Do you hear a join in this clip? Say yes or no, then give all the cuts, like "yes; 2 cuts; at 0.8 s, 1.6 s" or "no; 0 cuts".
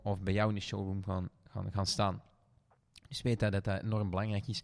no; 0 cuts